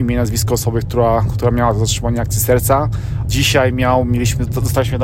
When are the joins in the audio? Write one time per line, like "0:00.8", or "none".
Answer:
0:03.2